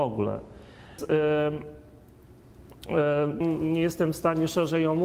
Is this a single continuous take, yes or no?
no